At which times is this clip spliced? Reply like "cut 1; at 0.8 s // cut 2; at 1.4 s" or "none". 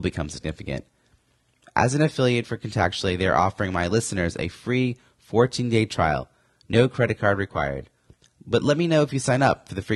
none